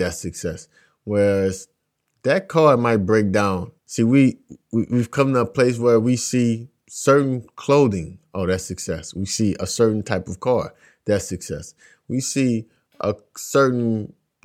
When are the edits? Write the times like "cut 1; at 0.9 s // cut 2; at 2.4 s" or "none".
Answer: cut 1; at 3.8 s